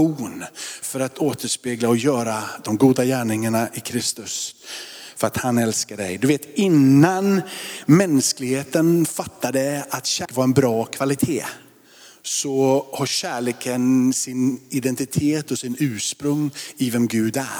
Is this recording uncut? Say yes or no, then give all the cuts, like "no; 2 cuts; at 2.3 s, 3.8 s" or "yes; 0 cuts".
yes; 0 cuts